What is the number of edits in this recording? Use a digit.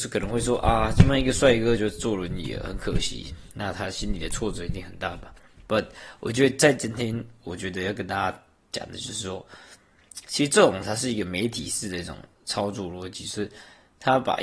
1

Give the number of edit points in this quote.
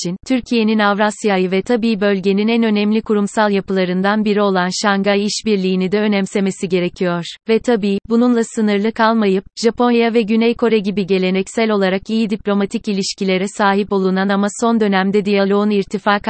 1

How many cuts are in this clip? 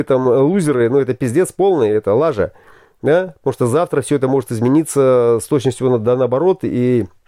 0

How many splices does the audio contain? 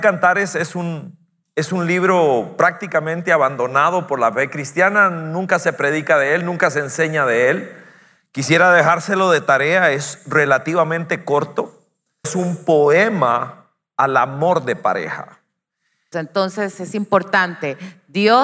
2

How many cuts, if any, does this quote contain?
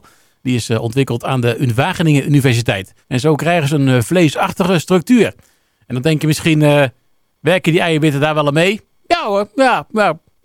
1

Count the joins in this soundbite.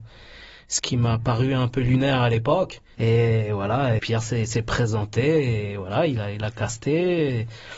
2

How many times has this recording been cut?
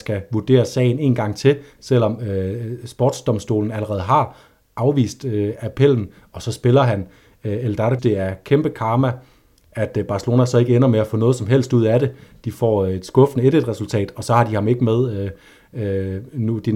1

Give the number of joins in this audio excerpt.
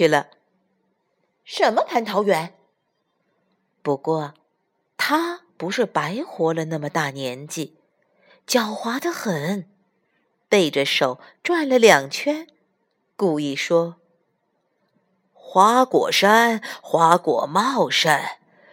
1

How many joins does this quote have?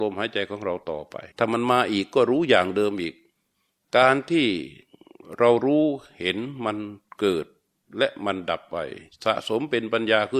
1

